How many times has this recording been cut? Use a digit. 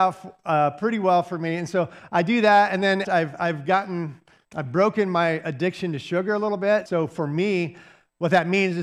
3